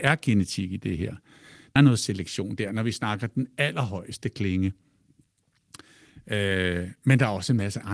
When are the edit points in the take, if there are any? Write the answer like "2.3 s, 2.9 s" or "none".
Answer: 1.8 s